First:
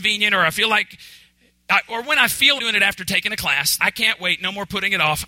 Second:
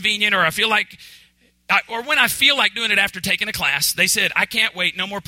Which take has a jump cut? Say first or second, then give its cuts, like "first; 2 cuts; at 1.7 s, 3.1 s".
first; 2 cuts; at 2.6 s, 3.8 s